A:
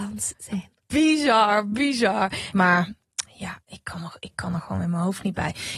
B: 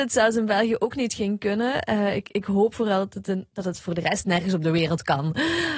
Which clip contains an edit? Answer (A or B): A